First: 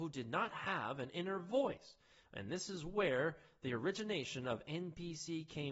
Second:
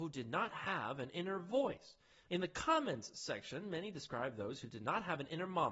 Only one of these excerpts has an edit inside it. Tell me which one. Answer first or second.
second